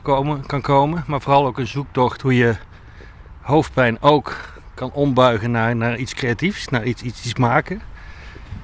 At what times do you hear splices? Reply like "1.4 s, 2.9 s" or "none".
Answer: none

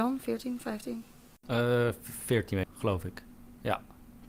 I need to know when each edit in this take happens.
2.6 s

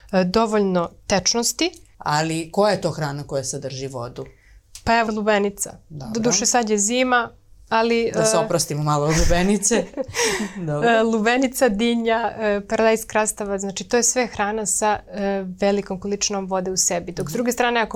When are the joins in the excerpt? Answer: 1.9 s, 5.1 s

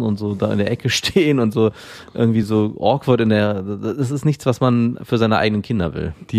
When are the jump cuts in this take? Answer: none

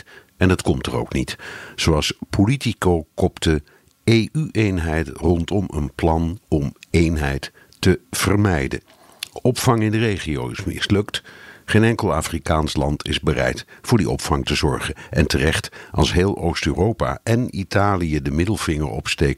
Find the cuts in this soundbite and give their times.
none

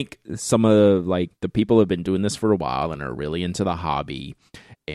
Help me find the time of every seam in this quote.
1.3 s

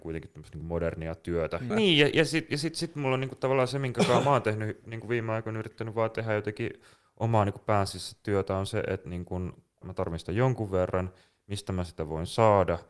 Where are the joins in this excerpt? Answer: 1.7 s, 9.8 s

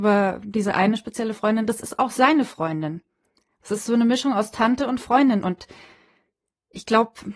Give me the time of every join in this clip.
none

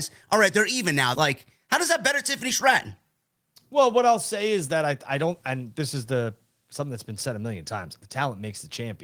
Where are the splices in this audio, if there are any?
1.1 s, 8.0 s

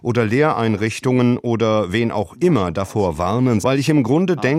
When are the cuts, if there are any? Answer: 3.6 s

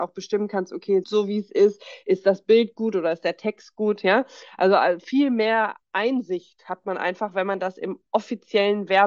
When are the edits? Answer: 1.0 s

